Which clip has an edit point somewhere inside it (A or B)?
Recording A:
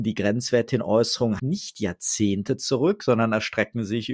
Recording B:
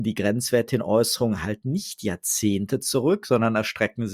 A